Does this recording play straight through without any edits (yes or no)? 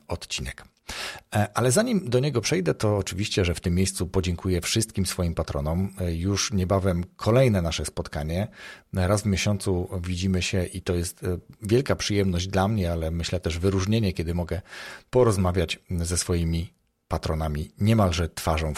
yes